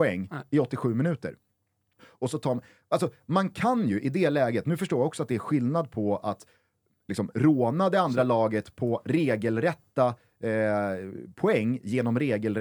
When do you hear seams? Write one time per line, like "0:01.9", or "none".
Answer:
0:02.0